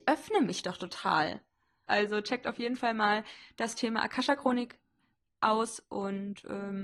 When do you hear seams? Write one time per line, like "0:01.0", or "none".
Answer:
0:01.9